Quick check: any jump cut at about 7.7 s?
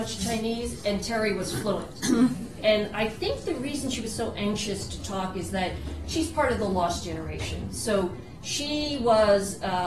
no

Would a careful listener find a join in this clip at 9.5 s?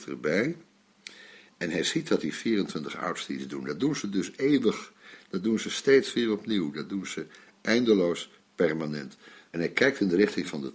yes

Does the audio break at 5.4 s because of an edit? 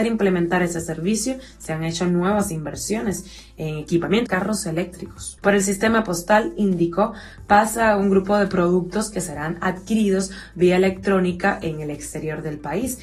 yes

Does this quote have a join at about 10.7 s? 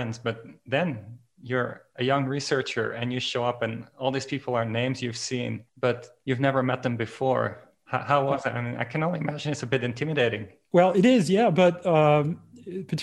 no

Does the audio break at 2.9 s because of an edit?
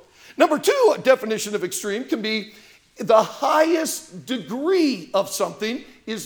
no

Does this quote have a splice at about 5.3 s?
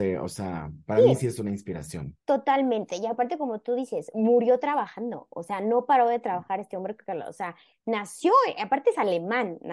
no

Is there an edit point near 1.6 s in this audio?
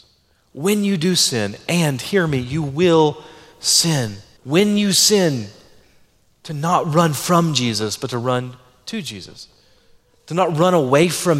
no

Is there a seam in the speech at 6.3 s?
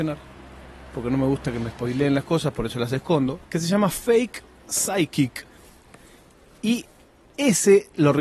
no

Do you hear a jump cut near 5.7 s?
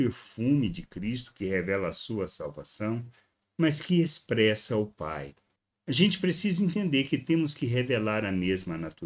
yes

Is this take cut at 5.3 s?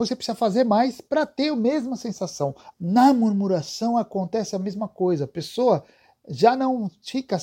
no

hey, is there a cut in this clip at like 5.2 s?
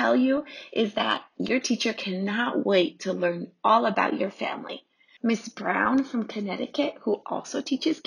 yes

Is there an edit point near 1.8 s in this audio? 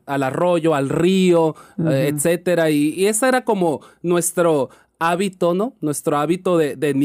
no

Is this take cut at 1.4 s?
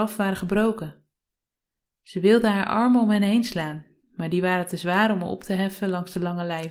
no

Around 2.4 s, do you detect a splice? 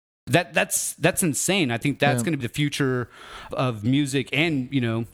yes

